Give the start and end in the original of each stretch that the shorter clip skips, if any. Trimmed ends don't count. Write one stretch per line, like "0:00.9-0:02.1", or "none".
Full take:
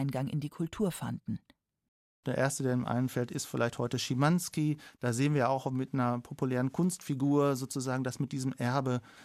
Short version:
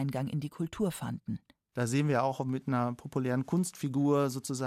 0:01.7-0:05.0